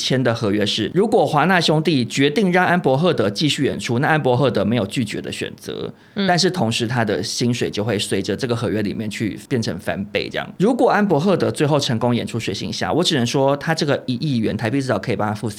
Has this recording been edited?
no; 0 cuts

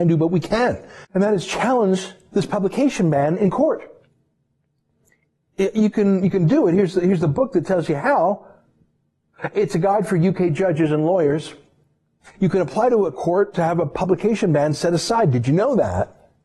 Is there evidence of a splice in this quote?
yes; 1 cut; at 1.0 s

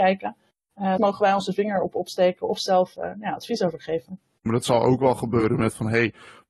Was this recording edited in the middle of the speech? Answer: yes; 2 cuts; at 1.0 s, 4.5 s

